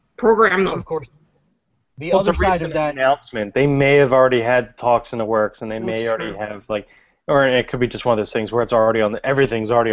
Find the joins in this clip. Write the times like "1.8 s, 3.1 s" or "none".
none